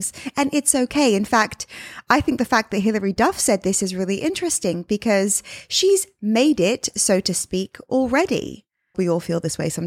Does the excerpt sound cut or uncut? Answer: cut